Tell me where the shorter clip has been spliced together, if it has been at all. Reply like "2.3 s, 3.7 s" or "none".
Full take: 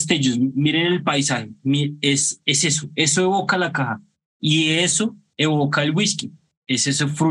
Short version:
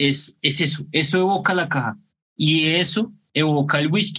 none